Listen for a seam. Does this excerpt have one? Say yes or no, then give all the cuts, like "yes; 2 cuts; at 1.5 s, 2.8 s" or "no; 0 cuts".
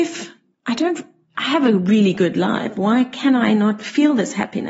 no; 0 cuts